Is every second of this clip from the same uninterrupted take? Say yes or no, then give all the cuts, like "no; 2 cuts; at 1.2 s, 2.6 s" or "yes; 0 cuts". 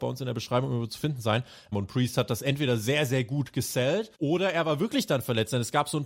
no; 2 cuts; at 1.7 s, 4.1 s